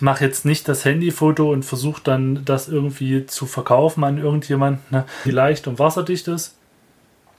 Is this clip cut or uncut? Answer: cut